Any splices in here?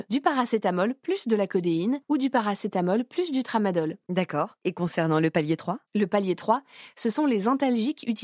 yes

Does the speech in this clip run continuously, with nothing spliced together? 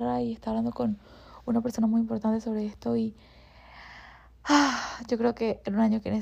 yes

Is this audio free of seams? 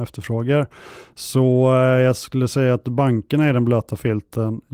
yes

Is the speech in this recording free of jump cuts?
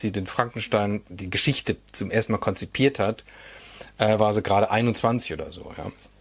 no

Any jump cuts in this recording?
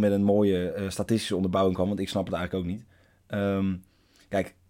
no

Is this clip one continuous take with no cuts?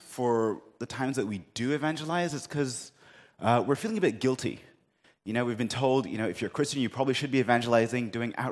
yes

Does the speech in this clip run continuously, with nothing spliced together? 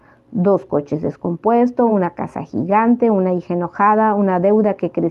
yes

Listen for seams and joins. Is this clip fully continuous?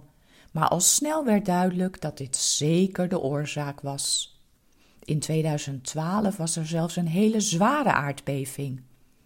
yes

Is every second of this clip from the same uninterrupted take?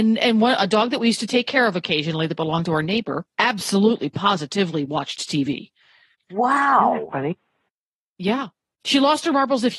no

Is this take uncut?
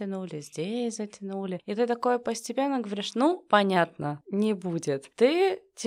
no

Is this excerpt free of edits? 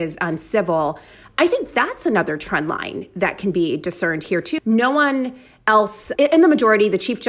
no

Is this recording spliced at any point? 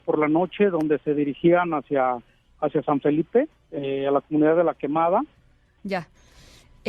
yes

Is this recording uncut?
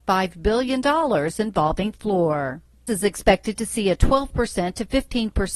no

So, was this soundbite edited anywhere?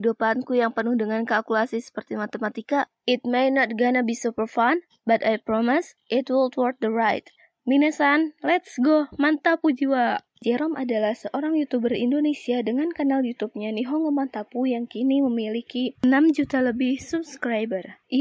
no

